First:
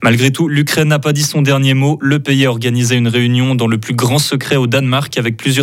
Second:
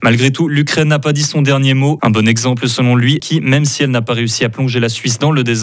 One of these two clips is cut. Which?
second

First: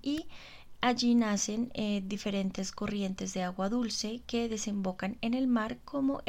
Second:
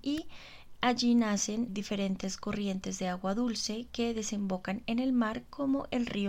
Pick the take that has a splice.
second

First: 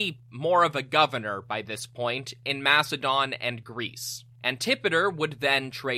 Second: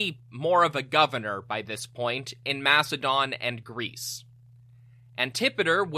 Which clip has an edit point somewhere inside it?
first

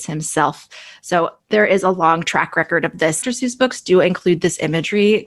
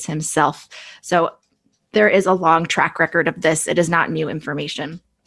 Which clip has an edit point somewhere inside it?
first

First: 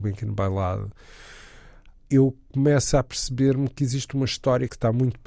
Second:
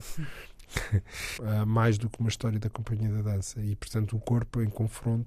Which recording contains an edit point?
second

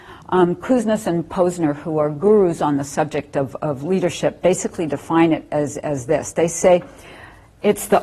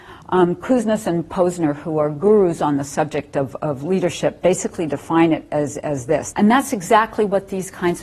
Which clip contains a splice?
second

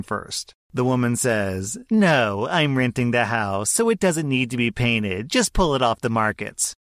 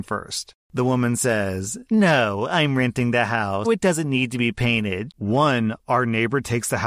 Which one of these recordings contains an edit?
second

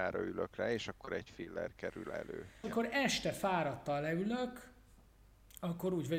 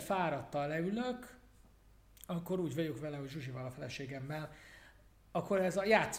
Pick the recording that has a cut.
first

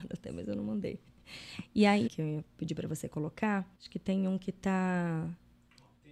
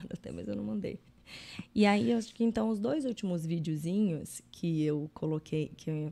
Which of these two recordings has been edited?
first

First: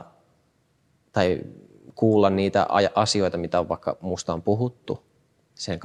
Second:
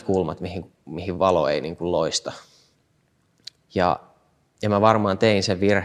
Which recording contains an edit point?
second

